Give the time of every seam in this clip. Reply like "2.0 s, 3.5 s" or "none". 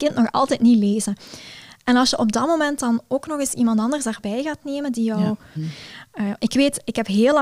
5.6 s